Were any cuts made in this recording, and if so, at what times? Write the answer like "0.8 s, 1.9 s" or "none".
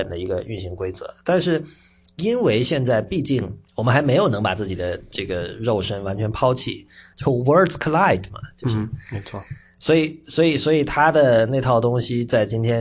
3.7 s, 7.1 s